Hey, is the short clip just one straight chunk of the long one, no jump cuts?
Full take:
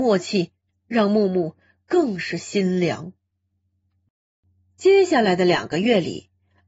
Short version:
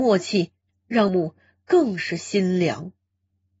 no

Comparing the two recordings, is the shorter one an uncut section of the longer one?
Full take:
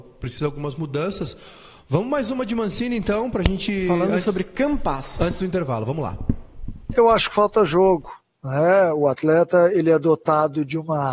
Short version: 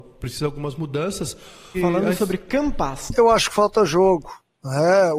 no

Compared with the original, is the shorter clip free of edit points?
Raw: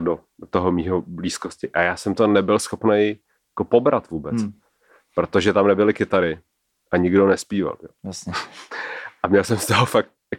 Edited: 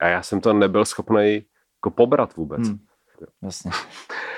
no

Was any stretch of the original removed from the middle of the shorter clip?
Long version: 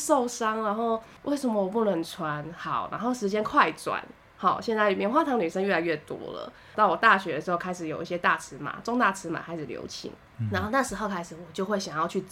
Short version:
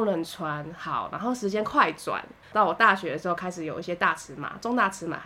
yes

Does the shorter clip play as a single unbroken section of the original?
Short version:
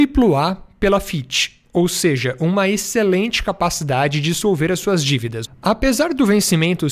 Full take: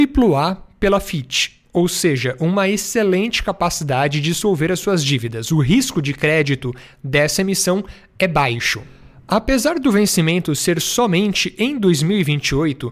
no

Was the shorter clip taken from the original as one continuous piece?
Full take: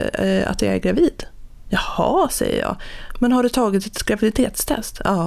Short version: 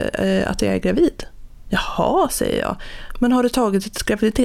yes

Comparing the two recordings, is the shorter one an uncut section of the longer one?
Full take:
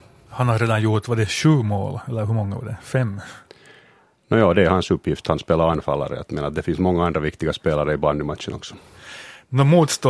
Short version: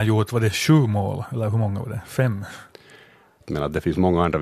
no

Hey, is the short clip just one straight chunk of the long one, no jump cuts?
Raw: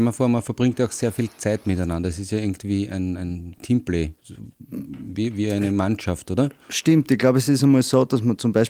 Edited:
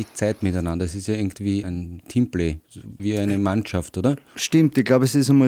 no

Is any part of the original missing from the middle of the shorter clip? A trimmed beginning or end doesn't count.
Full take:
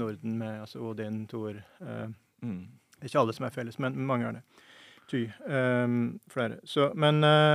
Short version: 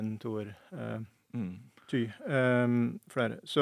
yes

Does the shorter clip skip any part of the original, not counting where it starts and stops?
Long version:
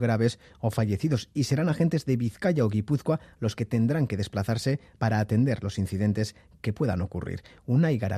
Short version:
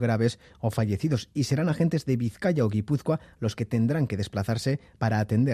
no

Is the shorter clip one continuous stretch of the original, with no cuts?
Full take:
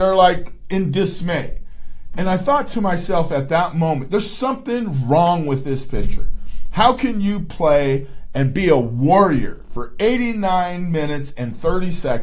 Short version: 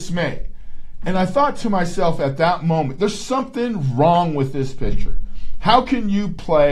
yes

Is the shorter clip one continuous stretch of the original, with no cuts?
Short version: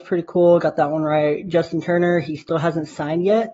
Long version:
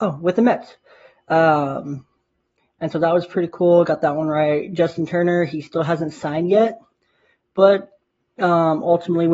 yes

